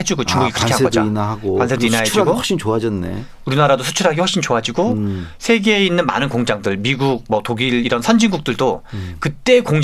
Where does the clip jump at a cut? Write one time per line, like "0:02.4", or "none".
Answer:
none